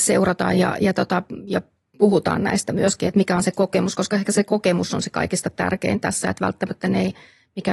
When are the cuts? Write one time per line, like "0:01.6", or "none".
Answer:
none